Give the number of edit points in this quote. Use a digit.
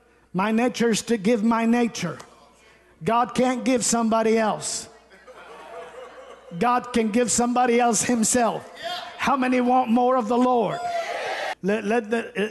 1